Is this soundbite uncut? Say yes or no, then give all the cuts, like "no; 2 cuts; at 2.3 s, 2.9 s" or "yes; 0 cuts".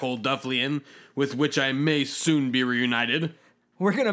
yes; 0 cuts